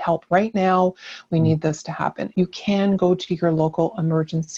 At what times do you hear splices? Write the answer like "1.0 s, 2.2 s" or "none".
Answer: 2.3 s